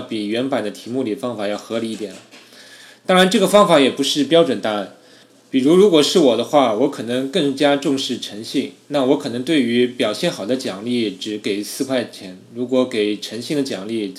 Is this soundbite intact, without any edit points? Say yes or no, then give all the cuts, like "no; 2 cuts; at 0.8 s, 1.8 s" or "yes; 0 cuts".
yes; 0 cuts